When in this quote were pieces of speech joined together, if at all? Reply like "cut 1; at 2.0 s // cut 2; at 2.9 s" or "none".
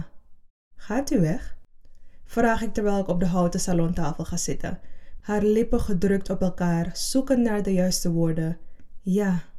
cut 1; at 5.2 s